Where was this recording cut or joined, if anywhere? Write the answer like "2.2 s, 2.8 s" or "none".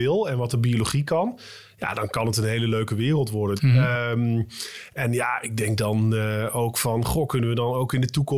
3.6 s

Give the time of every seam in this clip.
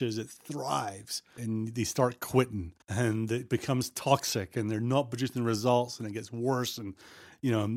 1.4 s, 2.8 s

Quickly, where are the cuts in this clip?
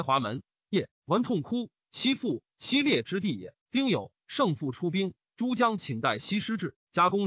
3.6 s

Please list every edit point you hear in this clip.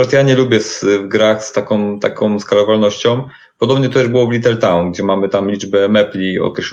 none

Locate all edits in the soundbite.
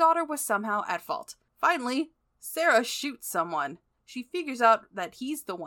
1.5 s, 4.0 s

